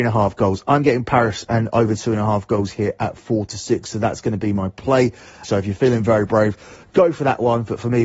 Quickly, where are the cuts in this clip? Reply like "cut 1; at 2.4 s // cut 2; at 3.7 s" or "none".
cut 1; at 5.4 s